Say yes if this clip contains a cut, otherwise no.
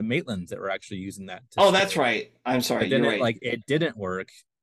no